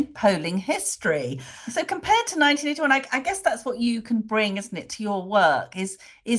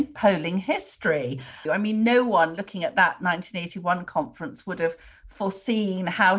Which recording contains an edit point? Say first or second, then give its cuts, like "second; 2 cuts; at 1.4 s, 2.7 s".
second; 1 cut; at 1.7 s